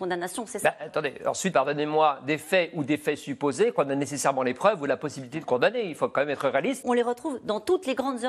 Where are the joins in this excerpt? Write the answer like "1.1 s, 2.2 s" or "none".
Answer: 1.5 s, 6.8 s